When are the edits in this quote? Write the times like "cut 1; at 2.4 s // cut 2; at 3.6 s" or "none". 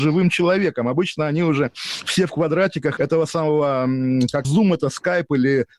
cut 1; at 3.0 s // cut 2; at 4.4 s